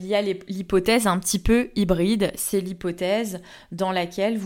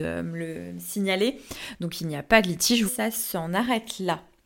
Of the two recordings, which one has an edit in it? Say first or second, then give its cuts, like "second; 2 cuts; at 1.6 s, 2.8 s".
second; 2 cuts; at 1.7 s, 2.9 s